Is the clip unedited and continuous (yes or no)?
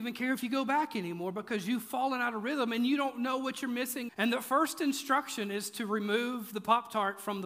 no